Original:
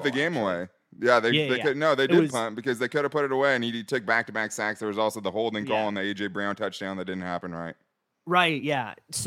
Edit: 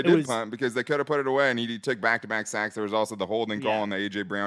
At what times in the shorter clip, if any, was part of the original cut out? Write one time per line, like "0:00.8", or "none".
none